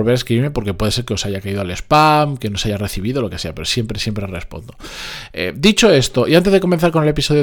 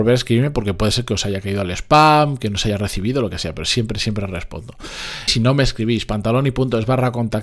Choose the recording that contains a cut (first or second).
second